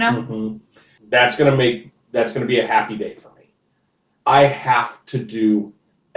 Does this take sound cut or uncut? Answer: cut